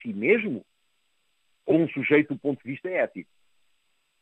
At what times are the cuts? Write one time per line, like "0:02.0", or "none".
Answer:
0:01.7